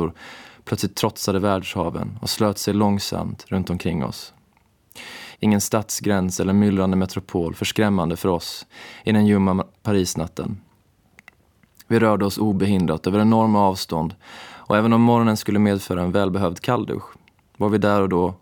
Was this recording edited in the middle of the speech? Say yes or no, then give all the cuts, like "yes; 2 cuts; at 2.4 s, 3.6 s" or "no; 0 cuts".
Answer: yes; 1 cut; at 5.3 s